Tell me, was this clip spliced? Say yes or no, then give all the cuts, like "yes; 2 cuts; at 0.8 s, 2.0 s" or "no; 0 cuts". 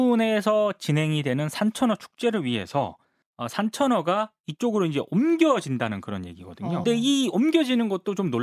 yes; 1 cut; at 6.8 s